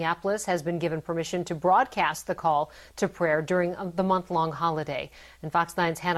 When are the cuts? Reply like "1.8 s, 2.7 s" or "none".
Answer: none